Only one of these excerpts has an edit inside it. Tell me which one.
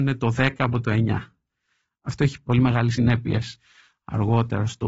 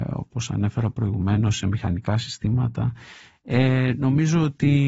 first; 1 cut; at 2.9 s

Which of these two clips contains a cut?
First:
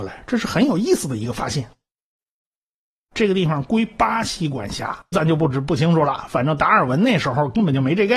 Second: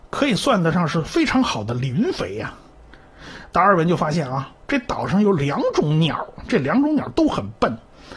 first; 2 cuts; at 3.1 s, 5.1 s

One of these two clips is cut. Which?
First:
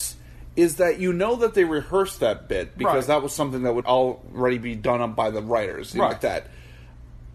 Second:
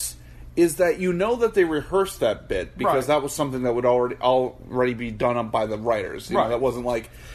first; 2 cuts; at 3.8 s, 6.1 s

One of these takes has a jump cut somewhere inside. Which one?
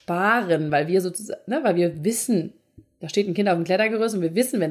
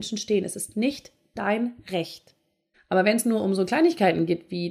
second; 1 cut; at 2.7 s

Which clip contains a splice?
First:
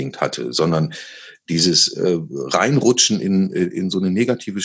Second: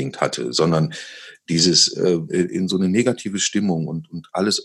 second; 1 cut; at 2.3 s

